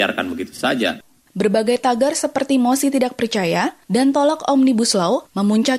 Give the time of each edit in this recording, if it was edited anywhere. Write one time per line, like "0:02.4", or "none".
0:01.3
0:03.9